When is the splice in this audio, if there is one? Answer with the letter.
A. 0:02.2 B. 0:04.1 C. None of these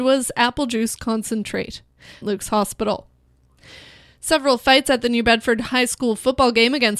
A